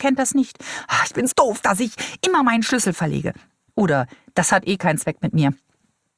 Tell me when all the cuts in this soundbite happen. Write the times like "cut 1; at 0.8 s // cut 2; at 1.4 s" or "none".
cut 1; at 1.3 s

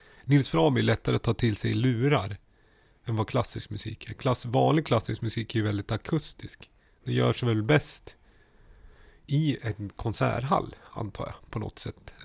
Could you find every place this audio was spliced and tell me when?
none

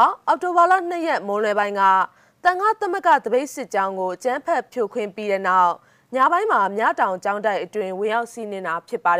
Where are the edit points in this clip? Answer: none

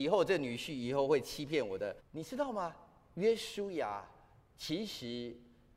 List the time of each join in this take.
cut 1; at 2.0 s

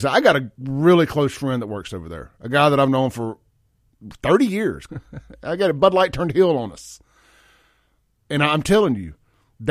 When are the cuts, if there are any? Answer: cut 1; at 4.9 s // cut 2; at 8.2 s

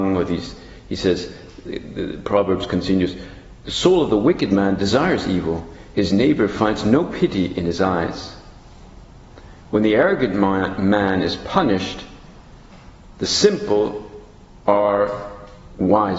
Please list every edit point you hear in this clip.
none

